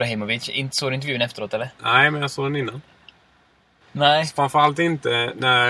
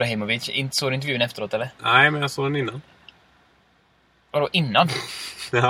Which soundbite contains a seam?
first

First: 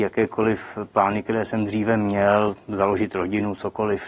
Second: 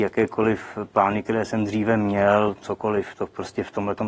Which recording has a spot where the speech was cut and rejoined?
second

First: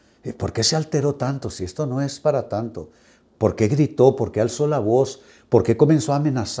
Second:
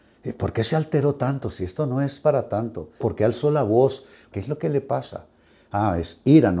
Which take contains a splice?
second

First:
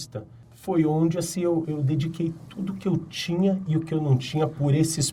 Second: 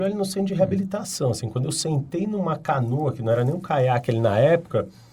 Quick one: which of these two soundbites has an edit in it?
first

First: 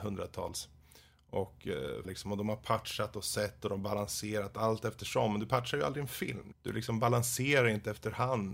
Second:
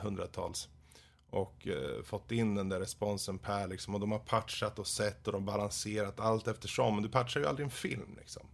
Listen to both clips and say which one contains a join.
first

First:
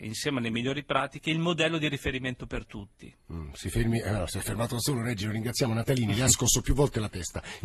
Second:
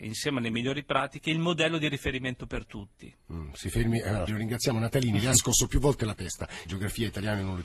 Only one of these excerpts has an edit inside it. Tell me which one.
second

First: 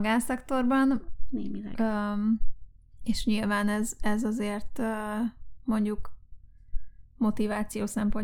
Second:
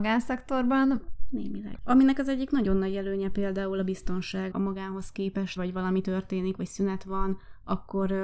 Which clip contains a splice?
second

